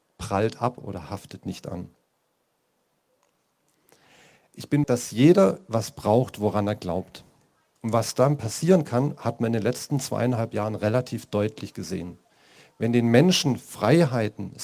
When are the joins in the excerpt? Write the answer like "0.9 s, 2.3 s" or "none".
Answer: 4.8 s, 7.8 s